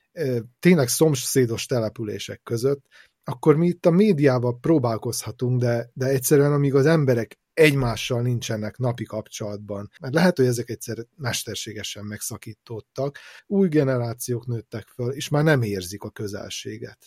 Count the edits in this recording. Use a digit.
2